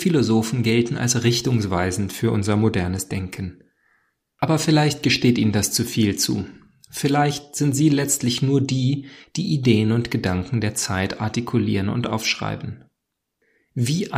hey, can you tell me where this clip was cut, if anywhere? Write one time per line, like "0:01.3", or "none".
none